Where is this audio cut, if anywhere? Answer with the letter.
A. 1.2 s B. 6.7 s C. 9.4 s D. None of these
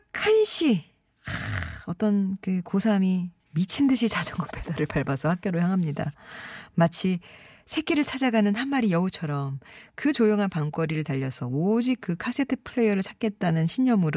D